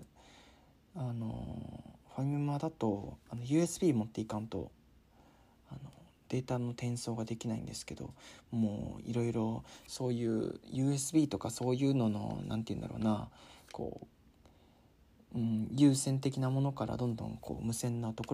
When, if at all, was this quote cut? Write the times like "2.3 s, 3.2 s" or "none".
none